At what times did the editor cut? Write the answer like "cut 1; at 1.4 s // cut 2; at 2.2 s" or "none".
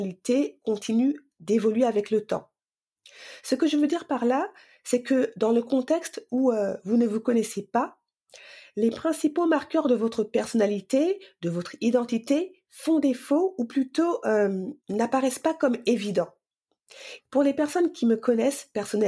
cut 1; at 14.8 s // cut 2; at 17.2 s